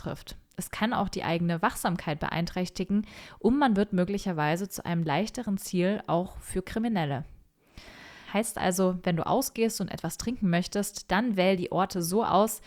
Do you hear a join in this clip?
yes; 1 cut; at 8.2 s

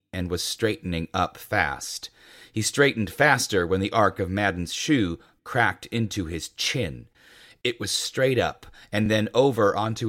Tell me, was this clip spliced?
no; 0 cuts

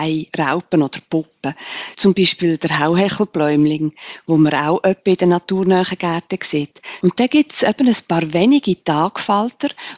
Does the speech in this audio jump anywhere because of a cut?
yes; 2 cuts; at 1.9 s, 7.0 s

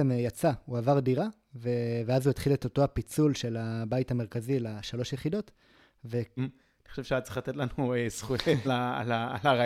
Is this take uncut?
no; 2 cuts; at 6.4 s, 8.6 s

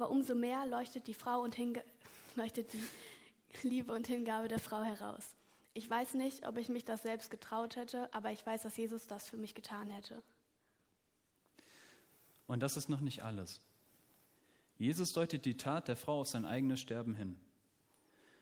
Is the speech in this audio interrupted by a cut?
no; 0 cuts

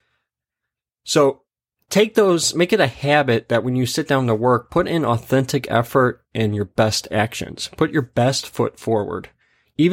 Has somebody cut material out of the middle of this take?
no; 0 cuts

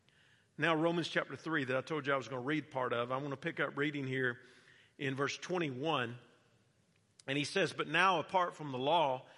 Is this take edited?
no; 0 cuts

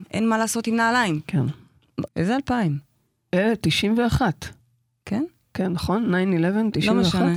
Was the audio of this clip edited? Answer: yes; 1 cut; at 2.1 s

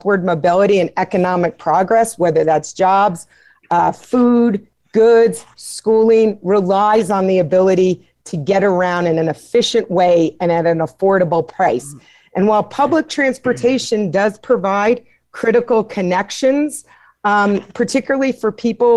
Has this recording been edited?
yes; 1 cut; at 5.5 s

